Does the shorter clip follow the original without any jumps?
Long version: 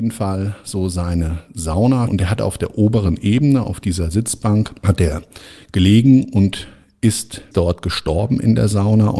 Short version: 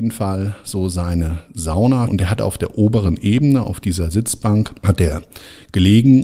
yes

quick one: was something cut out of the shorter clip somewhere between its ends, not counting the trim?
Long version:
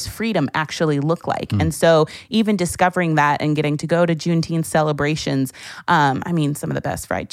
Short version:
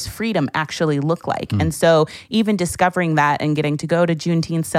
no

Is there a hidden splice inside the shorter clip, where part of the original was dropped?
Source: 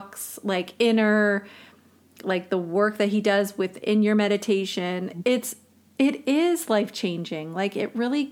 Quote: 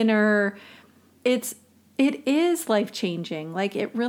yes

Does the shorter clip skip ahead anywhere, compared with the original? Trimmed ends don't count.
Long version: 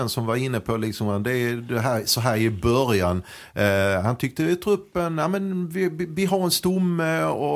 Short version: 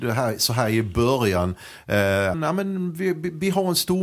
yes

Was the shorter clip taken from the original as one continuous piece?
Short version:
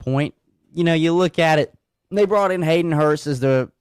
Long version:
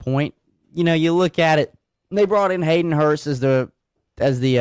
yes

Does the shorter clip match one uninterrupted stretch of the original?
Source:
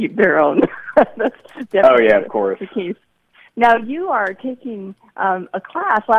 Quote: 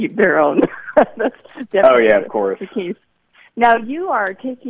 yes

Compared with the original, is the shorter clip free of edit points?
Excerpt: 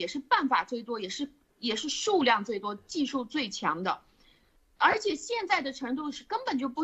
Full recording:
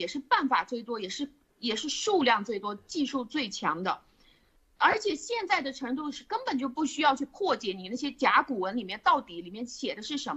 yes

